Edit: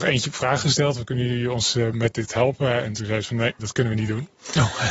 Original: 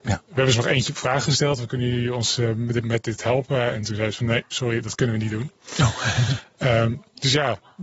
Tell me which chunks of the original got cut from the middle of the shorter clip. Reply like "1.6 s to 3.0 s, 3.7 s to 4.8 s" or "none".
2.5 s to 2.8 s, 4.5 s to 4.8 s

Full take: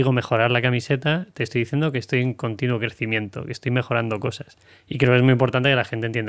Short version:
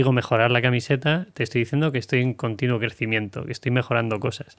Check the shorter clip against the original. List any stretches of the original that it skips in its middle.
none

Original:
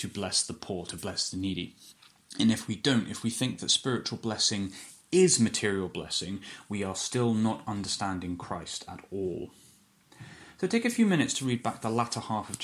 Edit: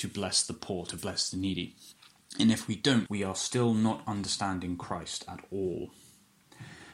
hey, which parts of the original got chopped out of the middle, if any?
3.1 s to 6.7 s

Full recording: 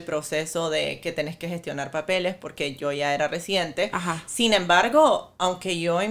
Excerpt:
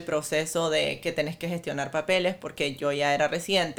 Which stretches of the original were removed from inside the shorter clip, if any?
none

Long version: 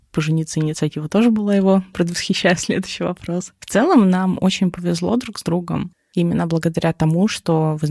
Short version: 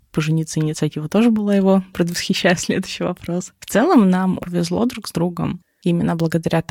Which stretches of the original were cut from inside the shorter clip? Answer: 4.4 s to 4.7 s

